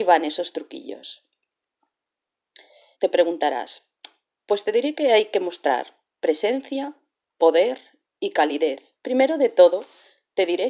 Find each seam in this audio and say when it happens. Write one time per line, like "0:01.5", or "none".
0:03.0
0:09.0